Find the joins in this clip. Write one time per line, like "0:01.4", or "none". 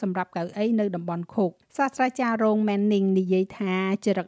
0:01.6

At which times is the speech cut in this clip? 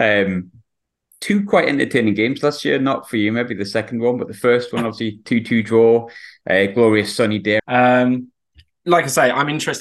0:07.6

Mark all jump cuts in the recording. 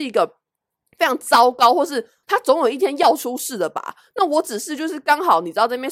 0:02.2

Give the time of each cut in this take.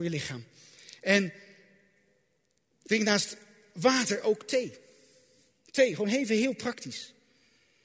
none

